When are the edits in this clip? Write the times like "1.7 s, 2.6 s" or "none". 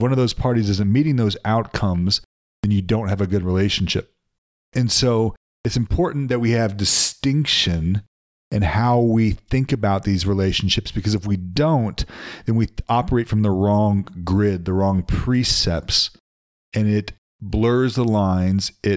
none